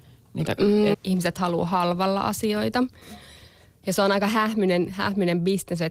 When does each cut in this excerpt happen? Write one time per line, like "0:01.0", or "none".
0:00.9